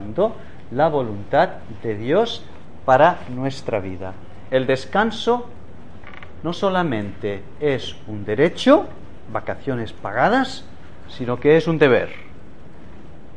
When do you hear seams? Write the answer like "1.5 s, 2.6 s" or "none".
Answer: 4.5 s